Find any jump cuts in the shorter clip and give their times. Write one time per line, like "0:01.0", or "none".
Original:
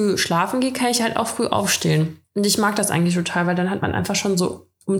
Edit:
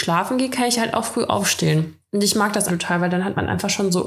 0:02.7